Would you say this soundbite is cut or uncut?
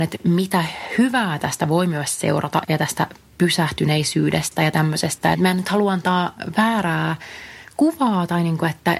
cut